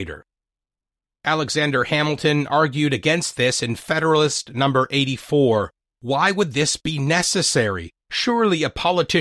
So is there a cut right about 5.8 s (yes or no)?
no